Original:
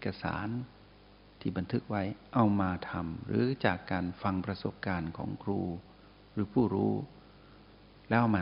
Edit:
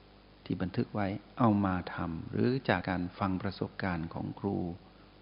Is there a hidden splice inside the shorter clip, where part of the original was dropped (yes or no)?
yes